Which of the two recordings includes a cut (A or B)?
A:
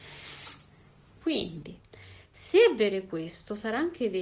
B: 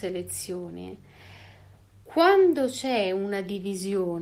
A